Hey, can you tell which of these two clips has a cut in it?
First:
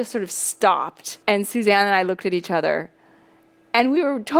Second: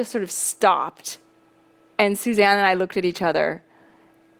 first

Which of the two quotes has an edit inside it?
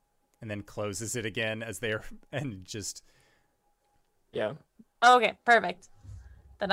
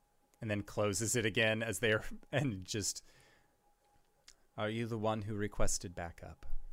first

